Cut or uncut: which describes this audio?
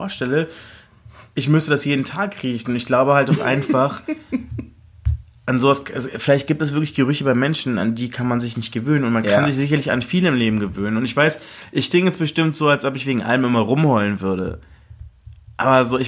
uncut